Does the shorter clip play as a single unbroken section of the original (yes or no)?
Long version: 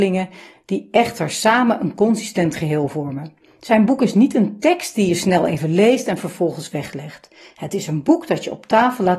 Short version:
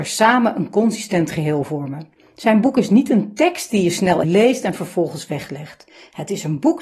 no